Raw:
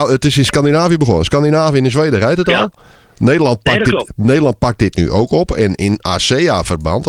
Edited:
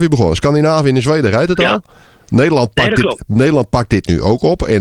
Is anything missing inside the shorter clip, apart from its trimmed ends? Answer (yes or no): no